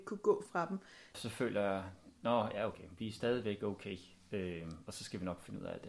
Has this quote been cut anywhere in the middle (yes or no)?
yes